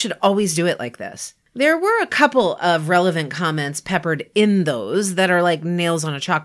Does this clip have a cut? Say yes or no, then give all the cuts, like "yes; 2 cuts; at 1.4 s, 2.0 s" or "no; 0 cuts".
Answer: no; 0 cuts